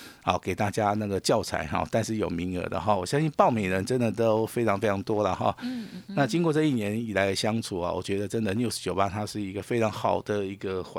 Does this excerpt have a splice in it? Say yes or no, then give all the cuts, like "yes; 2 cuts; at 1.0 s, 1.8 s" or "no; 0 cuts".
no; 0 cuts